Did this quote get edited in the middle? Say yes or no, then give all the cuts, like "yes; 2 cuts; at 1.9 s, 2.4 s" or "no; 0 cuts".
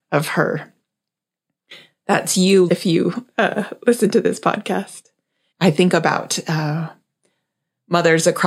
yes; 2 cuts; at 2.7 s, 5.5 s